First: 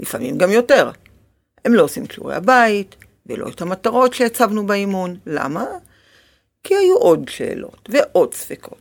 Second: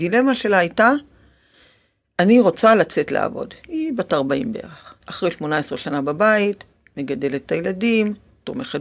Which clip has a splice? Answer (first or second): second